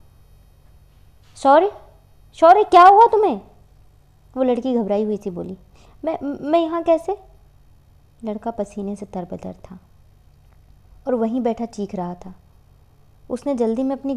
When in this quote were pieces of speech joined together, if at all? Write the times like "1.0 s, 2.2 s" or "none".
none